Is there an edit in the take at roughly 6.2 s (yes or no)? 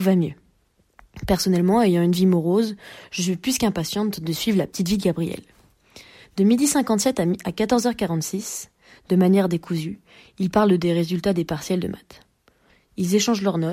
no